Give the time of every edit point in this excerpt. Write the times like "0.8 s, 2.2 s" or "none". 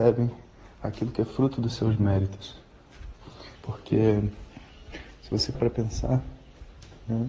3.6 s, 5.5 s